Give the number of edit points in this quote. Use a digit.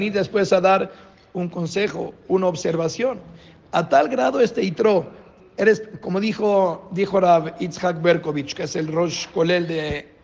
0